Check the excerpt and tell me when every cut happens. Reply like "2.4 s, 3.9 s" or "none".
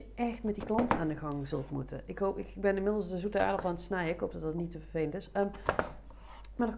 none